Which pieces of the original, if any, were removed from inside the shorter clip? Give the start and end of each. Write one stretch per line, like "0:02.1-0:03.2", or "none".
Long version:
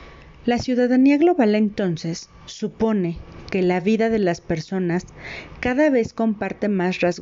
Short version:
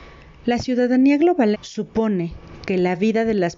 0:01.5-0:02.4